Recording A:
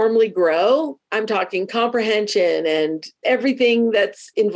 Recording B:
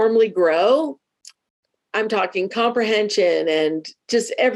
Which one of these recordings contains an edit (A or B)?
A